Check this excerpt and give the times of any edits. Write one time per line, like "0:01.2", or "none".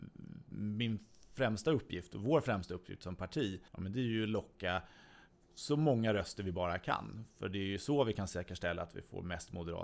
0:03.7